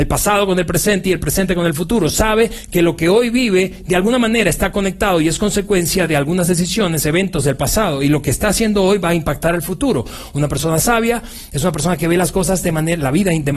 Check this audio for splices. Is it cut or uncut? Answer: uncut